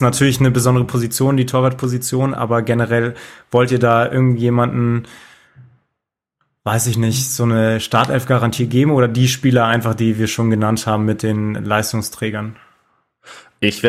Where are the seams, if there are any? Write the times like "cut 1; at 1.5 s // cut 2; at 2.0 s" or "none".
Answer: none